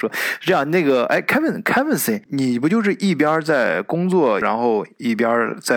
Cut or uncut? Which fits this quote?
cut